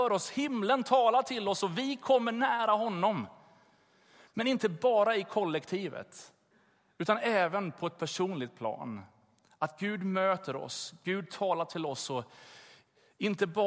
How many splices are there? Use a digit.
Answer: 0